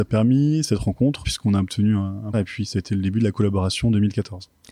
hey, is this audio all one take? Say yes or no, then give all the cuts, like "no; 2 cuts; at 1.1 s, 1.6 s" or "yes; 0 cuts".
no; 2 cuts; at 1.2 s, 2.3 s